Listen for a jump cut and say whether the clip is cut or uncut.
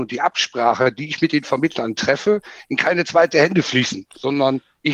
uncut